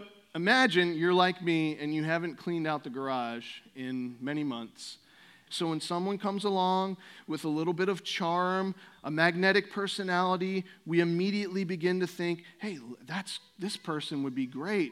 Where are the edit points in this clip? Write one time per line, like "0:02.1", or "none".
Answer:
0:05.5
0:08.9